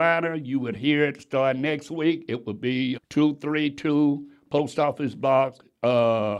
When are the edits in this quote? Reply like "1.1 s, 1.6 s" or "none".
2.9 s